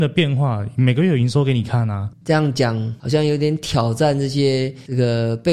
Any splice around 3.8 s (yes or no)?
no